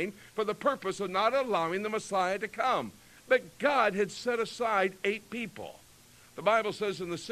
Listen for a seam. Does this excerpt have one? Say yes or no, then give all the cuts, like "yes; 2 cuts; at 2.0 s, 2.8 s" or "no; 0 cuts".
no; 0 cuts